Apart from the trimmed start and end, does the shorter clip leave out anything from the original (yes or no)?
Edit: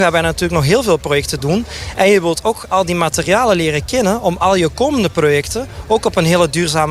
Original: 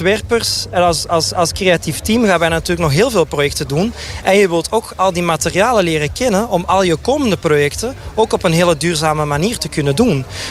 no